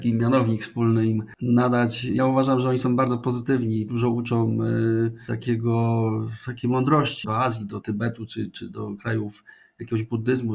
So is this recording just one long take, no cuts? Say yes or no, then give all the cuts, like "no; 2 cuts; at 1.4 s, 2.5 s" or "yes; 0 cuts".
no; 1 cut; at 7.2 s